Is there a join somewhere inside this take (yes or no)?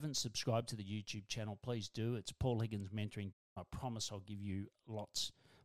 no